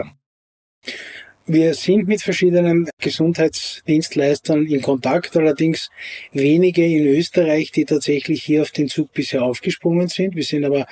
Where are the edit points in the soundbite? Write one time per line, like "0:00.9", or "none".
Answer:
none